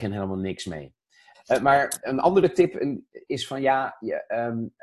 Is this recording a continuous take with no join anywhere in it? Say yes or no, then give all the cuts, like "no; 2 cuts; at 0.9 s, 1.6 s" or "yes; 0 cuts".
no; 1 cut; at 1.3 s